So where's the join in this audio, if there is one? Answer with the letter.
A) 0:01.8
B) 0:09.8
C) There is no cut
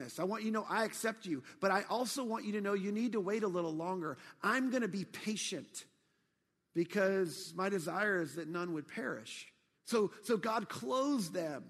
B